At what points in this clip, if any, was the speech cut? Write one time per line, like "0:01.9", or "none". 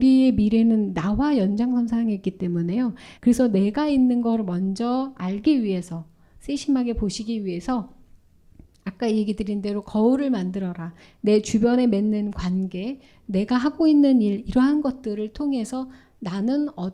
0:03.2

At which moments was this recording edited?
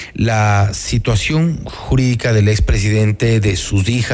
none

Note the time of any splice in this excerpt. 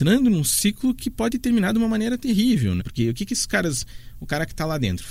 0:02.8

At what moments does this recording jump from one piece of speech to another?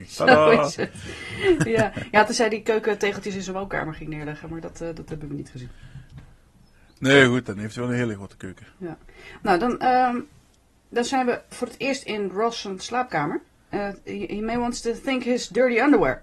0:11.5
0:13.7

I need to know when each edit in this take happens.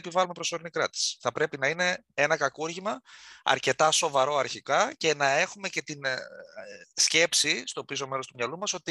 none

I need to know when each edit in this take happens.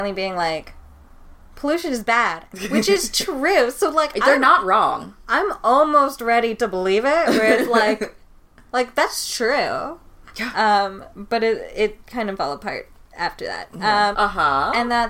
0:14.1

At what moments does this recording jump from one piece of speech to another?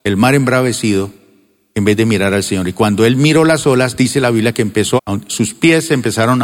0:05.0

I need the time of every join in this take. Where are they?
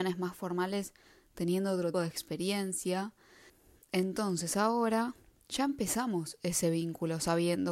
0:01.9

